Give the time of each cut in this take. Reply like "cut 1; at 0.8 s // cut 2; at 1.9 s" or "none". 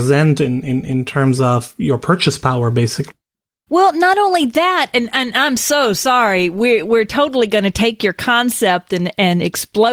none